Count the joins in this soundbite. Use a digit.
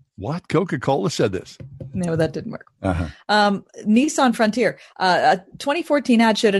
0